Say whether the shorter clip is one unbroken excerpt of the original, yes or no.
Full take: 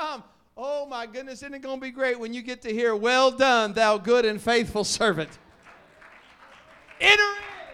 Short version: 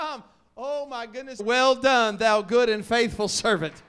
no